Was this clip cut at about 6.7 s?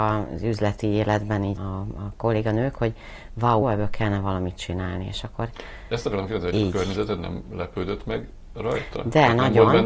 no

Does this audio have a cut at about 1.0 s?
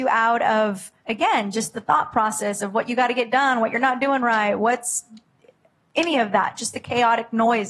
yes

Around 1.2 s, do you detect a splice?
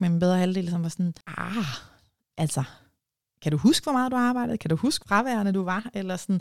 yes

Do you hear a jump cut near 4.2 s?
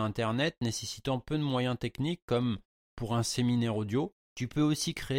yes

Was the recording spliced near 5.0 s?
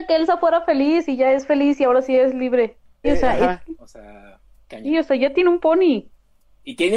no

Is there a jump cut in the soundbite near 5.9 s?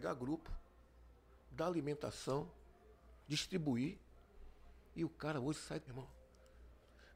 yes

